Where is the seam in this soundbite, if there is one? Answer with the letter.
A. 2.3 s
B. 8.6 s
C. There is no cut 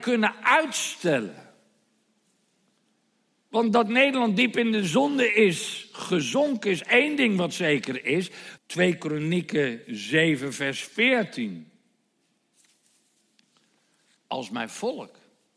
B